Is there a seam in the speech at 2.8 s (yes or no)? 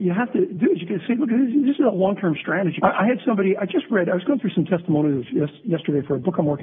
yes